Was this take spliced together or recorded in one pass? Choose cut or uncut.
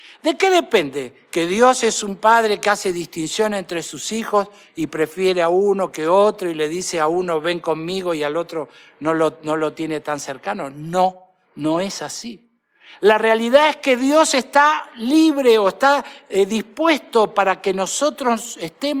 uncut